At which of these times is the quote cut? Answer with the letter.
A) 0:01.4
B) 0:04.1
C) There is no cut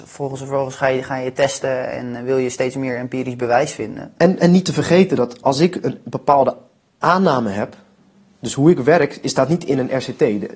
C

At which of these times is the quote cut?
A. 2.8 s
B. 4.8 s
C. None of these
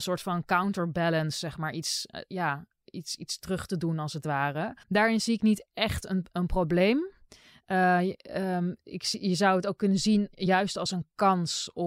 B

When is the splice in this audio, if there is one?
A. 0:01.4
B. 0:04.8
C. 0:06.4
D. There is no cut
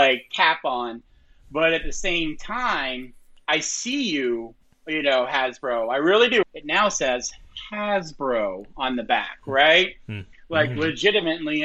C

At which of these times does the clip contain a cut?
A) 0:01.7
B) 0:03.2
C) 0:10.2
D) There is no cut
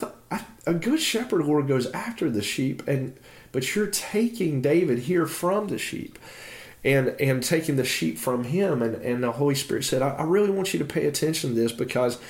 D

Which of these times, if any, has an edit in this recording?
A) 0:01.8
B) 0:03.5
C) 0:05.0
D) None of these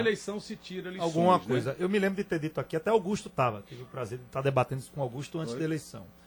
D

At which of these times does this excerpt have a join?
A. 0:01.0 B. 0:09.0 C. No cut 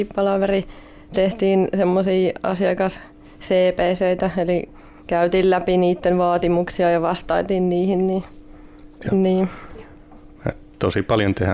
B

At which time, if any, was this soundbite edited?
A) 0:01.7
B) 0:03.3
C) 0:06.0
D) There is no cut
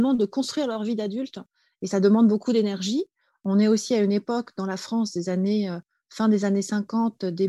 D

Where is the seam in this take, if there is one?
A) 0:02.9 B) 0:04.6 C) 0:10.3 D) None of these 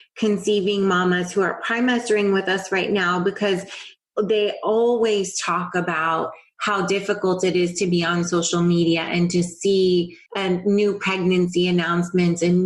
C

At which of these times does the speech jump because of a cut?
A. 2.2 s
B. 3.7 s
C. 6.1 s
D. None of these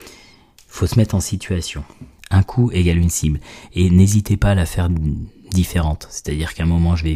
A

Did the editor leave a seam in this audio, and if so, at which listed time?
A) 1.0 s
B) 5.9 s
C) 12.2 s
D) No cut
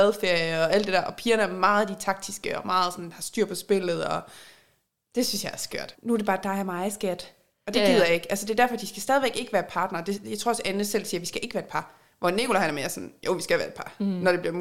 B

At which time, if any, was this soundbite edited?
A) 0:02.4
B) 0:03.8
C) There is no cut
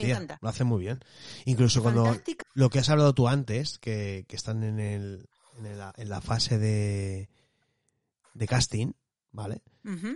A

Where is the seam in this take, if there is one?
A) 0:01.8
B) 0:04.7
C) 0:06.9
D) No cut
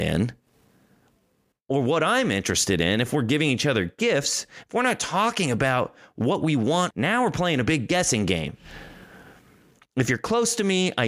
C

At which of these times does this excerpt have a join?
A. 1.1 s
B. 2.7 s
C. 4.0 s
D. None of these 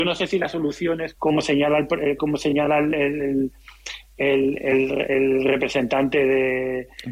A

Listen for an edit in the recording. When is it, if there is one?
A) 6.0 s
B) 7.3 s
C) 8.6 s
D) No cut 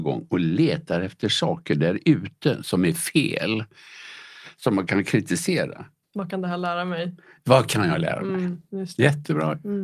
A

